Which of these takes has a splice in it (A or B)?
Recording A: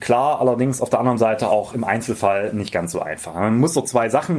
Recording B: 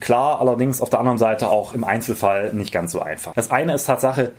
B